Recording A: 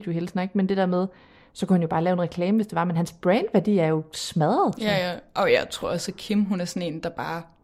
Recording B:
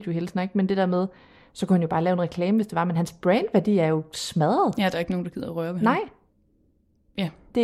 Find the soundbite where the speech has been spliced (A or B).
A